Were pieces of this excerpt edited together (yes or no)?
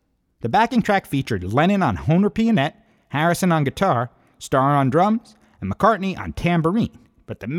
no